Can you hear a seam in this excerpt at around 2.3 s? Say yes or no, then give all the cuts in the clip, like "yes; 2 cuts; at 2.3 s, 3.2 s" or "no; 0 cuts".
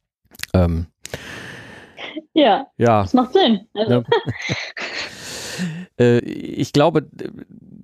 no; 2 cuts; at 4.0 s, 6.2 s